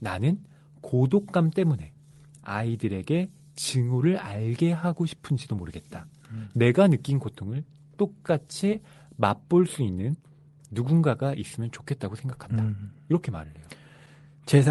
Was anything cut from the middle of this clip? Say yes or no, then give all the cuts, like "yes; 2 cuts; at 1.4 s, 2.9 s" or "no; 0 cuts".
no; 0 cuts